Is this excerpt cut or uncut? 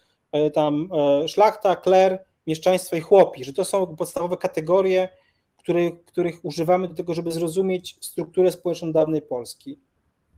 uncut